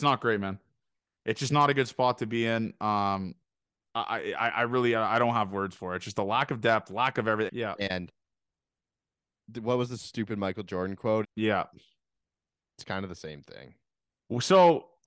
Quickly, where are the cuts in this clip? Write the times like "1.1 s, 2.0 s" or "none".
7.5 s, 11.2 s